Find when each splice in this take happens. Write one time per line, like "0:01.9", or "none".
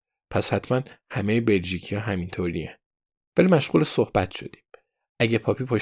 0:03.3